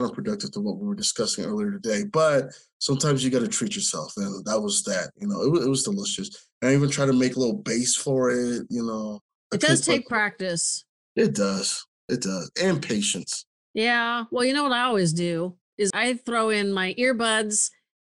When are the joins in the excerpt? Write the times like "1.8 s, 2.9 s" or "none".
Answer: 7.3 s, 15.9 s